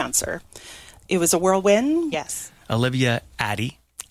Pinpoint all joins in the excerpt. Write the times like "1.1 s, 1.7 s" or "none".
2.1 s